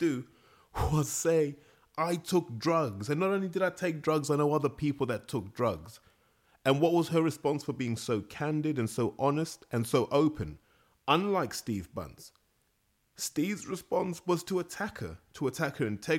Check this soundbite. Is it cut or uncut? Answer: uncut